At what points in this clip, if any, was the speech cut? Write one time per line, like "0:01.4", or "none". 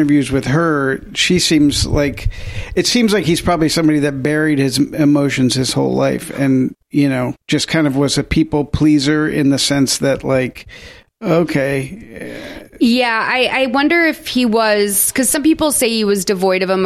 0:07.4